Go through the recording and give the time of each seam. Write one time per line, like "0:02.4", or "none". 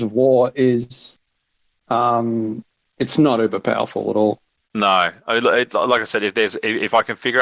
none